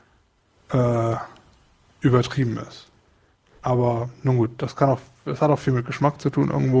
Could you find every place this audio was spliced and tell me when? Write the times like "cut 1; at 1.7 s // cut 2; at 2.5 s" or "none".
none

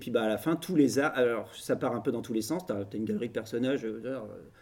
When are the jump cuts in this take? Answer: none

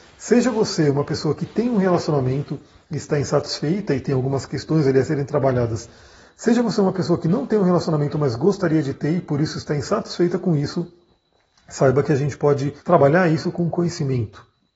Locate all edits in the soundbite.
cut 1; at 12.8 s

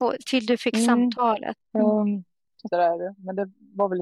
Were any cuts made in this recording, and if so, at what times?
cut 1; at 1.6 s // cut 2; at 2.7 s

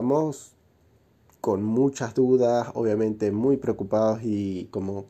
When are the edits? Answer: none

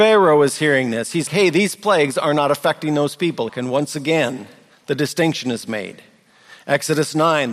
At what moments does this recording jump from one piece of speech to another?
cut 1; at 1.3 s // cut 2; at 3.5 s

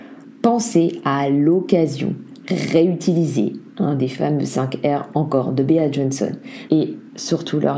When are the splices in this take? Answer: cut 1; at 6.7 s

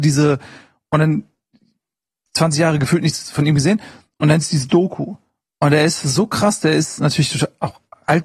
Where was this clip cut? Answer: none

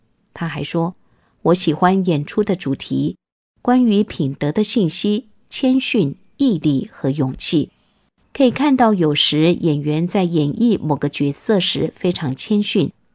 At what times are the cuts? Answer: cut 1; at 8.2 s

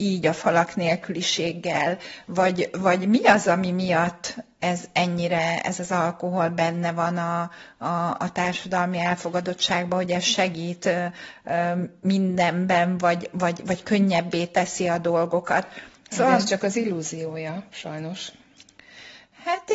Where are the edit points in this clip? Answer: none

